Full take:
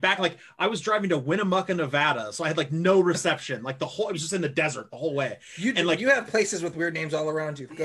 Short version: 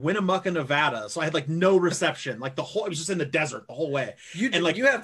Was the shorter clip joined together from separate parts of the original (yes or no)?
no